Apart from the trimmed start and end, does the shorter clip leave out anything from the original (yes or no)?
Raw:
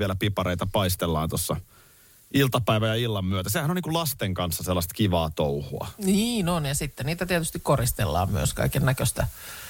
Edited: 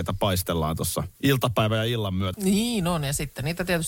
yes